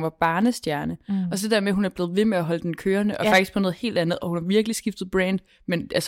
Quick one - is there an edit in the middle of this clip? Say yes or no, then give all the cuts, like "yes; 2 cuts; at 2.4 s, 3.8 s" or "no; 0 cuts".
no; 0 cuts